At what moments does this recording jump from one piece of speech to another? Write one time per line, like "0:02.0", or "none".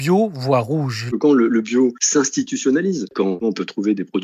0:01.1
0:03.1